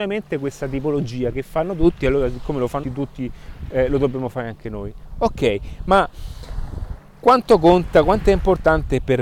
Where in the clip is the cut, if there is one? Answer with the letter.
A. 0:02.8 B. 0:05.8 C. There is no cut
A